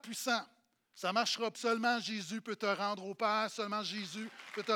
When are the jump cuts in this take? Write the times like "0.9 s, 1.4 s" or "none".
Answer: 1.5 s